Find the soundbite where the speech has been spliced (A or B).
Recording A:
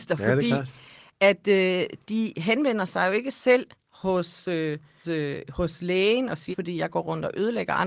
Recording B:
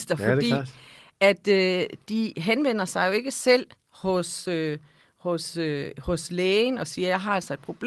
A